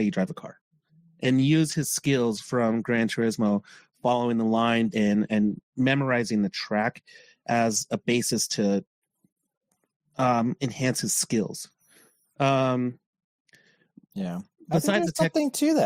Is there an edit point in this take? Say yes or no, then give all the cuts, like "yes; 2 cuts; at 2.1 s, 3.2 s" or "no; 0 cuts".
yes; 1 cut; at 4.9 s